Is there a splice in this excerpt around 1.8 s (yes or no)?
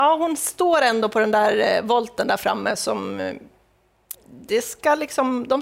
no